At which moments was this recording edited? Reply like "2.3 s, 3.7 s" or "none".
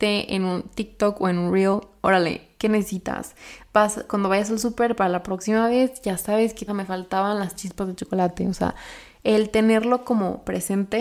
6.7 s